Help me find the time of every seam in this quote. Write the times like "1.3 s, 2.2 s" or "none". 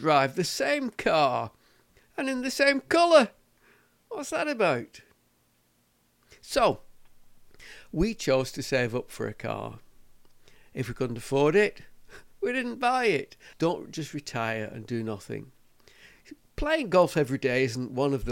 13.5 s